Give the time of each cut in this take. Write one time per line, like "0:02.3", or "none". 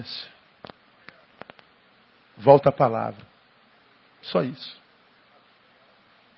none